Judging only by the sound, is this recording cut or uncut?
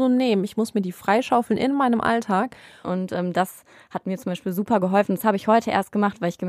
cut